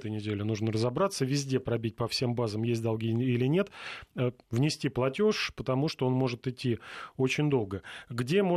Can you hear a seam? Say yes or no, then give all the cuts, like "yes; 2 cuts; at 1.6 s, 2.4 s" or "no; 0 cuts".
yes; 1 cut; at 4.4 s